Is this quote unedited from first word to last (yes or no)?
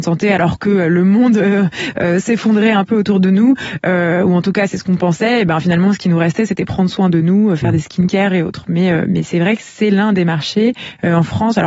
yes